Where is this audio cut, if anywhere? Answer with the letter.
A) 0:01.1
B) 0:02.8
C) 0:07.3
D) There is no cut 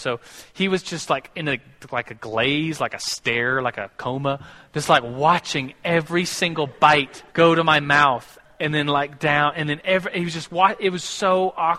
C